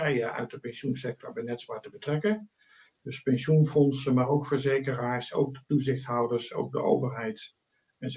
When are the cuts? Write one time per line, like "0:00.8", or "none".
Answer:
none